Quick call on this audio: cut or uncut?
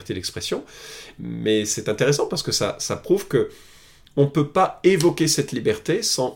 cut